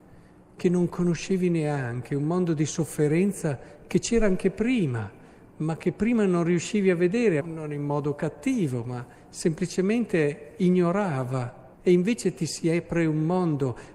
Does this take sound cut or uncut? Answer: cut